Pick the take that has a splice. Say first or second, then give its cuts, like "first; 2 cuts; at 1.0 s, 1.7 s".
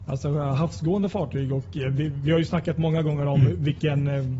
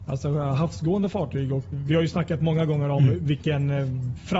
second; 1 cut; at 1.7 s